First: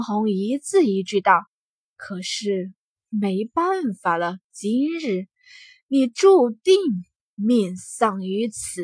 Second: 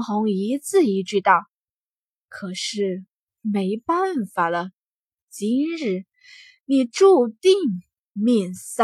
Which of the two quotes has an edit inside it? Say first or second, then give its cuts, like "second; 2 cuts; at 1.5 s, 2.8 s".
first; 2 cuts; at 1.5 s, 4.4 s